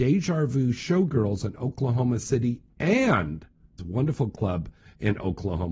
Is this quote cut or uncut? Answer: cut